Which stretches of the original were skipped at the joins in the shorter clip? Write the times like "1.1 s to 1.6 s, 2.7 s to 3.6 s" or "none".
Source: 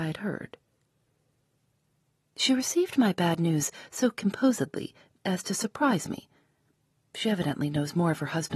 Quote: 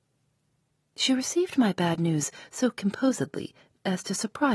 none